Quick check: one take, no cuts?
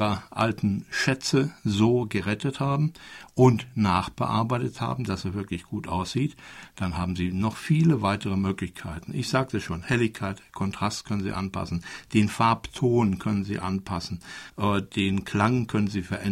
yes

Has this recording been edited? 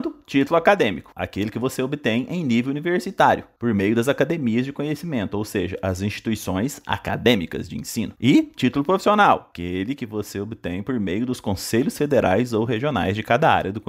yes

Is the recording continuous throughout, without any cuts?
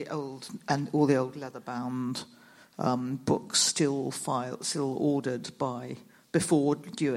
yes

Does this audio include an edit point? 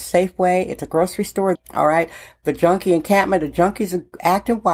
yes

